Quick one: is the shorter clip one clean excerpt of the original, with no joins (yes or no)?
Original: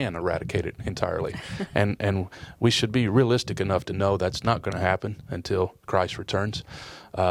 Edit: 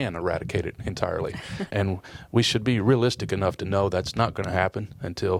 no